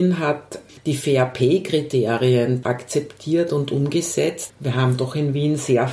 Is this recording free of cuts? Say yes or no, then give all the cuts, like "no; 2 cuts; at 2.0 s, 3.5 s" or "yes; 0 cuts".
no; 2 cuts; at 2.6 s, 4.5 s